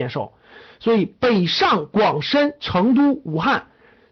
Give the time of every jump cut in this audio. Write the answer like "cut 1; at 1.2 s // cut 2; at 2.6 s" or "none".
none